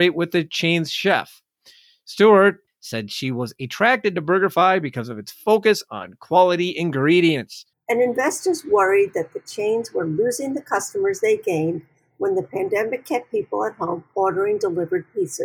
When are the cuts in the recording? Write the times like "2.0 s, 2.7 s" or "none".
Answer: 2.7 s, 7.7 s